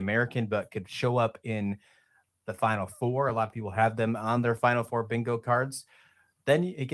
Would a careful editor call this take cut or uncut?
uncut